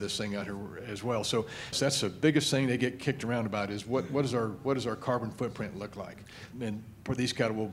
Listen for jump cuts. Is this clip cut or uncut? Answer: cut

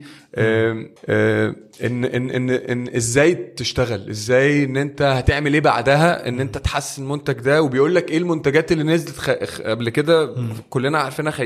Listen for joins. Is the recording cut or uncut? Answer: cut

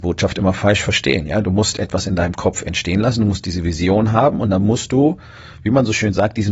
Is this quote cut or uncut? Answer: uncut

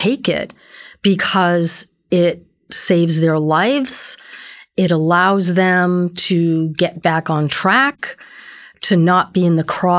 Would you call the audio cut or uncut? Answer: uncut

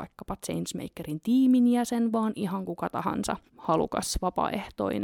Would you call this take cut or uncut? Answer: cut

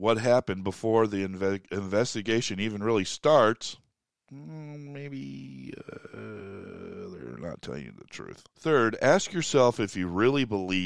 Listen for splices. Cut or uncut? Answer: cut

